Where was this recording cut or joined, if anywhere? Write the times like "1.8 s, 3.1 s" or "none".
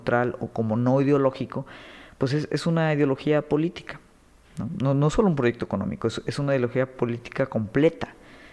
none